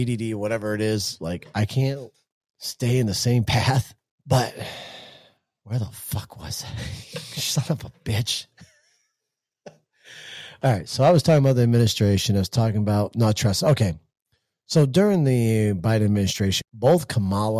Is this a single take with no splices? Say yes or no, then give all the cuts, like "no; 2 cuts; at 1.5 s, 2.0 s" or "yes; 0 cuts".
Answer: no; 2 cuts; at 4.1 s, 16.6 s